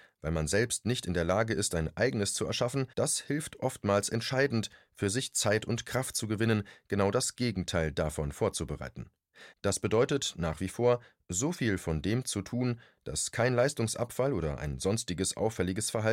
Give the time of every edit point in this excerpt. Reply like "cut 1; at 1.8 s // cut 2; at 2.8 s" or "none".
cut 1; at 2.9 s // cut 2; at 9.5 s

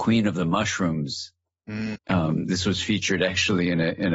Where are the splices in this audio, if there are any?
cut 1; at 1.9 s

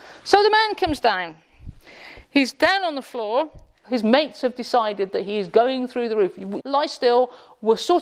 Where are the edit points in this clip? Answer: cut 1; at 3.8 s // cut 2; at 6.6 s

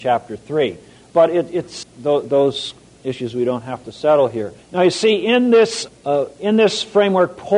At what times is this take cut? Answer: cut 1; at 1.8 s // cut 2; at 4.6 s // cut 3; at 5.9 s

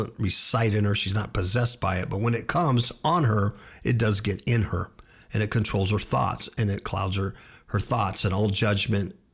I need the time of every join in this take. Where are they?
none

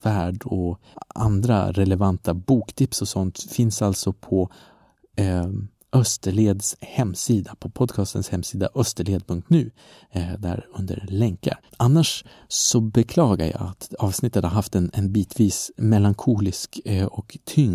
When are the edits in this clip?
cut 1; at 11.7 s

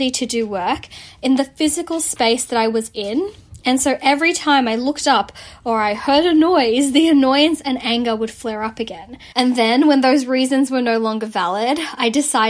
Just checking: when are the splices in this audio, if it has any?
cut 1; at 9.3 s

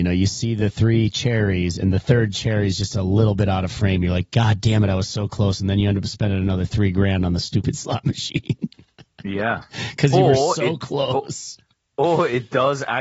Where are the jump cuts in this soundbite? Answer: none

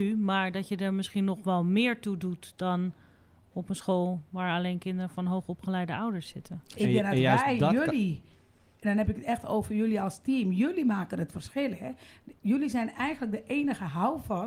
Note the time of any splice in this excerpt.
none

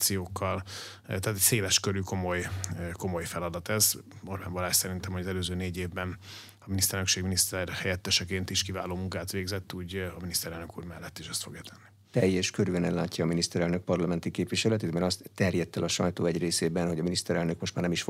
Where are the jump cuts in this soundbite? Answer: none

